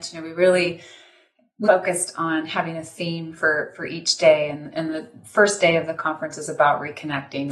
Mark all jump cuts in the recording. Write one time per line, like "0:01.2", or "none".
0:01.6